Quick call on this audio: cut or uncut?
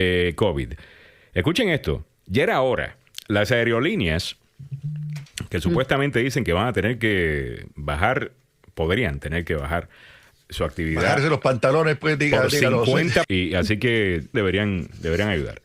cut